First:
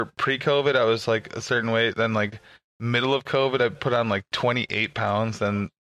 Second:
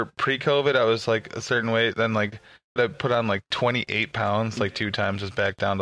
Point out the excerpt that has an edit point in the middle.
second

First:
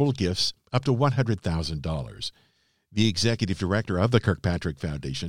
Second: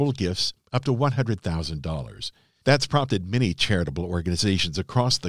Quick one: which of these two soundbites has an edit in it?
second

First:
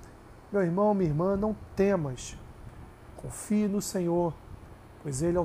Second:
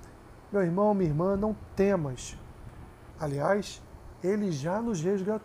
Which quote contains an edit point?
second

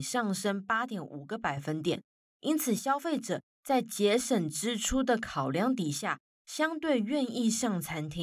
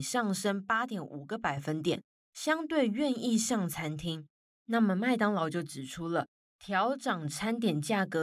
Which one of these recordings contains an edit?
second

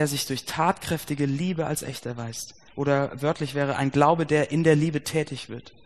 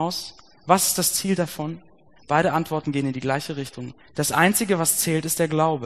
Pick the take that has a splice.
second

